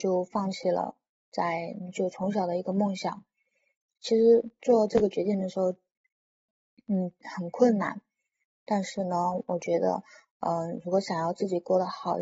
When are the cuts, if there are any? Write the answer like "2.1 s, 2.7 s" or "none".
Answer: none